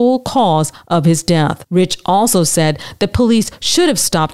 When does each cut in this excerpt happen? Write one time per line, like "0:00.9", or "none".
none